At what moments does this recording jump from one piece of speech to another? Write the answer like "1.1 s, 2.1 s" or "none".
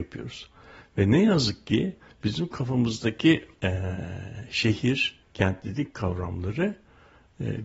3.5 s, 5.2 s